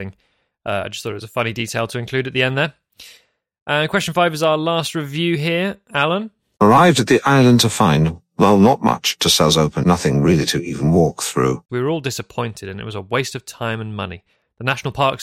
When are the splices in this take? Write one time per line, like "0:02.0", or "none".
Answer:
0:09.8
0:11.7